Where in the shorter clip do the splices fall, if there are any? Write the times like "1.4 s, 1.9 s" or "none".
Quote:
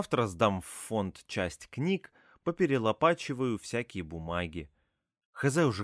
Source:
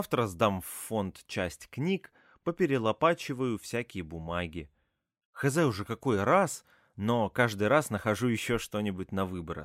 none